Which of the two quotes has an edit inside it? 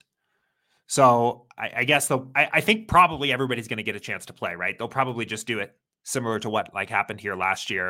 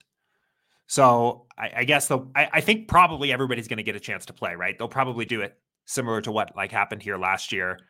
second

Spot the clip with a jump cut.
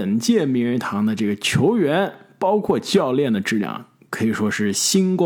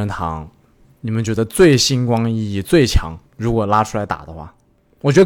second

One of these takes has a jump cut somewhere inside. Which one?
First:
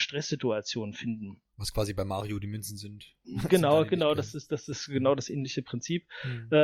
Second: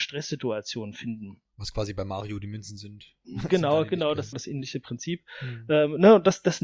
second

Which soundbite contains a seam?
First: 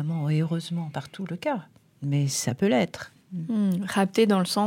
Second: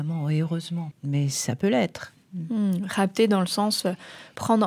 second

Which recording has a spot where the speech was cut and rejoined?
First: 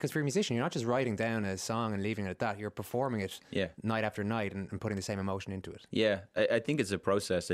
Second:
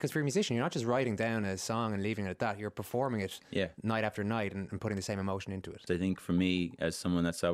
second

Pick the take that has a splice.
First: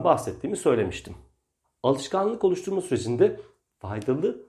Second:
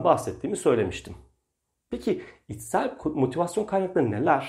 first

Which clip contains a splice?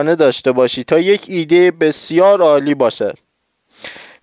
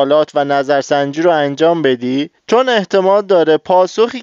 second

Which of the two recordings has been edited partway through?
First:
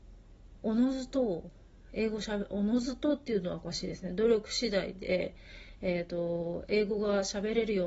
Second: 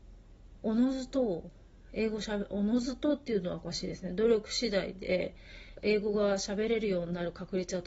second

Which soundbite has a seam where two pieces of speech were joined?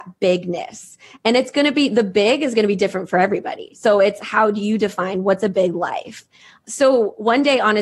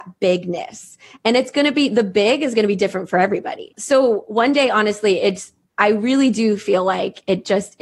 second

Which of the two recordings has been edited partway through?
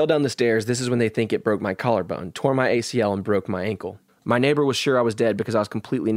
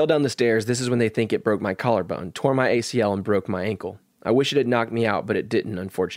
first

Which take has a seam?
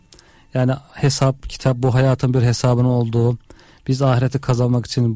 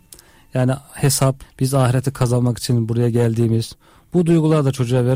second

